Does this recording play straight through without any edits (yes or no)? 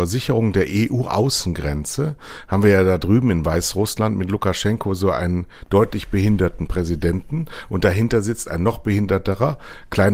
yes